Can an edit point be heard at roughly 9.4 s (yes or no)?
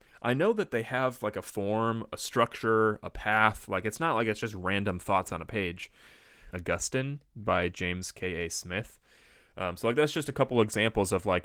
no